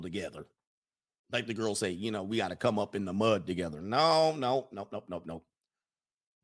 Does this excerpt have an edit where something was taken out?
no; 0 cuts

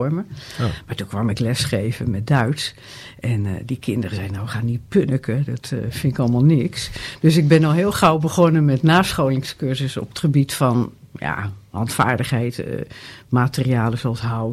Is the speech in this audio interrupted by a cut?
no; 0 cuts

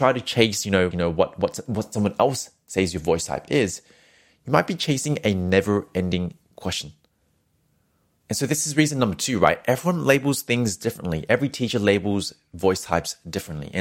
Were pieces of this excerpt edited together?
yes; 1 cut; at 0.9 s

